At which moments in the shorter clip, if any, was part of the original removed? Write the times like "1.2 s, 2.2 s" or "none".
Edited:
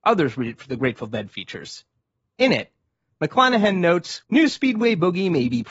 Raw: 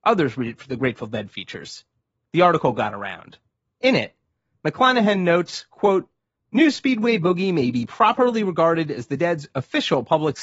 2.2 s, 4.2 s